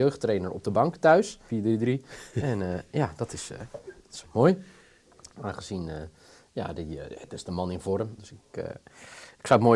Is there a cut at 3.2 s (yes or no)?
no